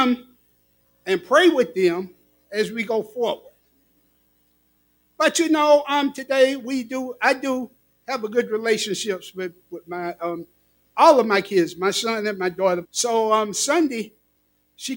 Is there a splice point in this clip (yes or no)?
yes